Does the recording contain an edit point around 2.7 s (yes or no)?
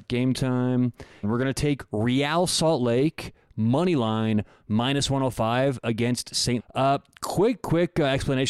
no